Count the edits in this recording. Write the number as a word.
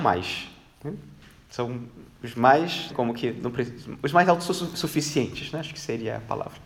one